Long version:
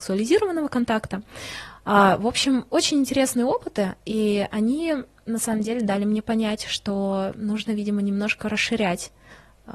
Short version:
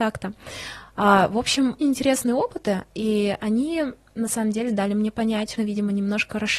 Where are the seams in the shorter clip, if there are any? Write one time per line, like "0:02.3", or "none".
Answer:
0:01.8
0:05.5